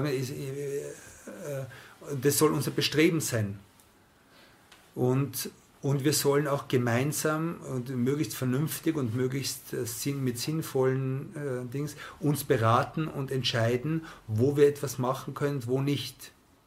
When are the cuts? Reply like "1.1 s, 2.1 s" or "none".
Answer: none